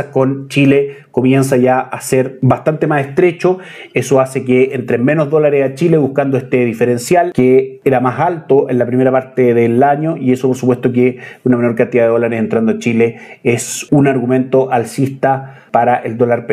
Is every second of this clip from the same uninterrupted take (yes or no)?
yes